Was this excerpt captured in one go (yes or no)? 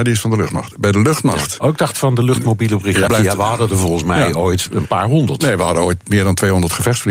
no